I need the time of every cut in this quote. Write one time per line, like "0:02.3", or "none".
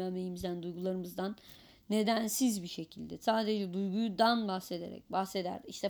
none